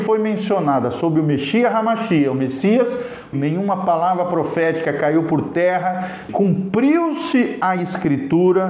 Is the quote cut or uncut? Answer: cut